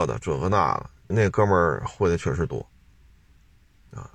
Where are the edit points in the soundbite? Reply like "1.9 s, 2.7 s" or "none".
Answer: 1.1 s